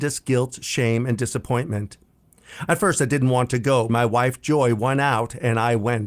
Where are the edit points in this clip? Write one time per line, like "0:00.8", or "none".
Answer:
0:02.7
0:03.9